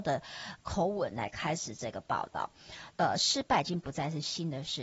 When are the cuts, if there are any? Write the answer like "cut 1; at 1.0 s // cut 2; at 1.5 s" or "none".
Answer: cut 1; at 2.9 s

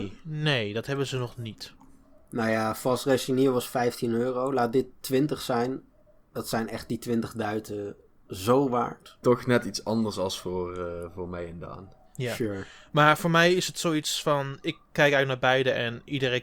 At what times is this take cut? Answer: cut 1; at 9.2 s

